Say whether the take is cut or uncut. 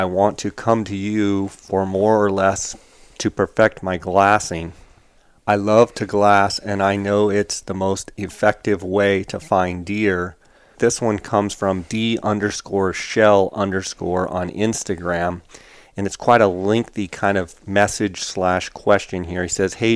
cut